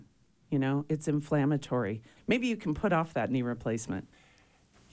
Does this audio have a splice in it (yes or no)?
yes